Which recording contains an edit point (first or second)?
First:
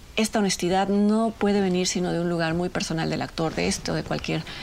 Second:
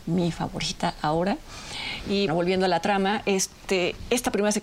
second